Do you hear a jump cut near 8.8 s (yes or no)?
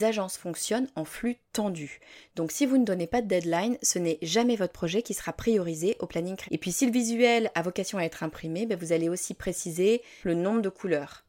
no